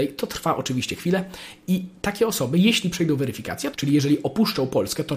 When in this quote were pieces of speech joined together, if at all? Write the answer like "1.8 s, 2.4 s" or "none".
3.7 s

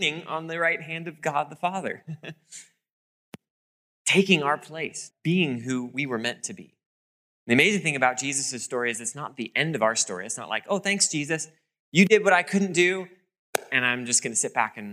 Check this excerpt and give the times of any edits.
5.1 s

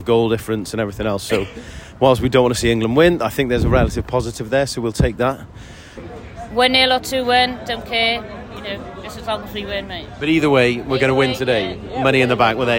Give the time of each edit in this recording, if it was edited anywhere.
6.0 s

